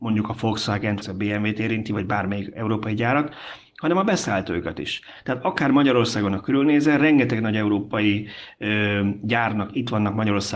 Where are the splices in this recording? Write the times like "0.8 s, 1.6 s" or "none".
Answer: 1.0 s